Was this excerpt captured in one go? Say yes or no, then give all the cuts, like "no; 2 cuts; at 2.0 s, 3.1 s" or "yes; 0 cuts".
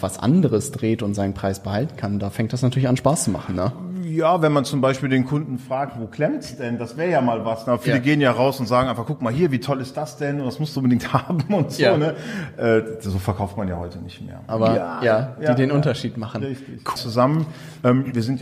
no; 2 cuts; at 14.5 s, 17.0 s